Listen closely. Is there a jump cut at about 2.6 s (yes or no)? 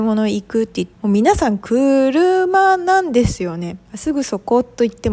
no